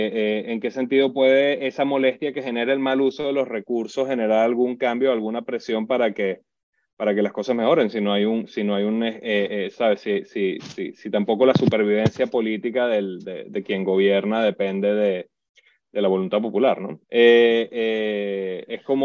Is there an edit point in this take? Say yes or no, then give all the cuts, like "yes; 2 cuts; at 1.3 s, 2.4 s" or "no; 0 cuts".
yes; 1 cut; at 17.0 s